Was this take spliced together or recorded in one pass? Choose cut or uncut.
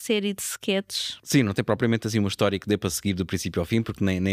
uncut